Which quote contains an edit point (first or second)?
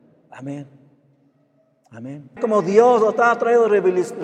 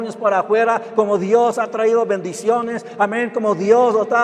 first